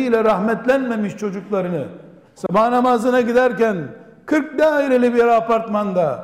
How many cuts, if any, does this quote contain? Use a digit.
1